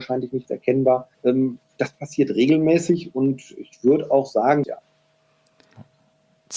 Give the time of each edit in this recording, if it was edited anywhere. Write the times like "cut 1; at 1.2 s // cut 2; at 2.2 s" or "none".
cut 1; at 1.1 s // cut 2; at 4.6 s